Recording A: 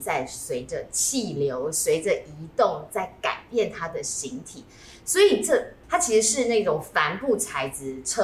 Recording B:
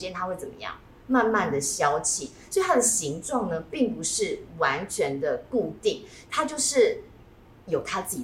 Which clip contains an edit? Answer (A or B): A